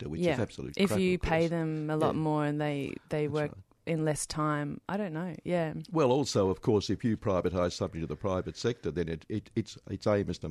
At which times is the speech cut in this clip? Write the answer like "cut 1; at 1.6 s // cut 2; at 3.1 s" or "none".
none